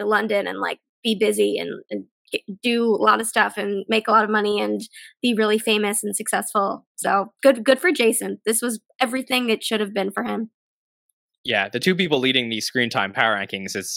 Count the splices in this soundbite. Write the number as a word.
zero